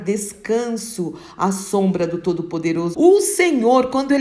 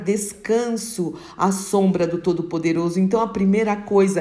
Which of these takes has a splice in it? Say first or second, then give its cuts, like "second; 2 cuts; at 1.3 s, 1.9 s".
first; 1 cut; at 2.9 s